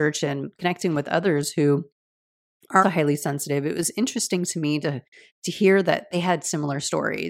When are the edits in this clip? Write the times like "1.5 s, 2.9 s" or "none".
2.8 s